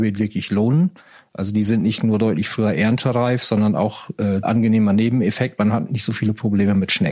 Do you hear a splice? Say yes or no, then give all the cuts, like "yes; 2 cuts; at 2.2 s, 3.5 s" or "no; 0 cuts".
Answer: yes; 1 cut; at 4.4 s